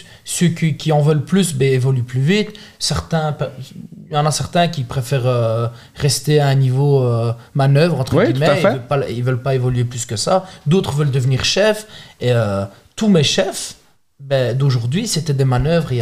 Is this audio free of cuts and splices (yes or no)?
yes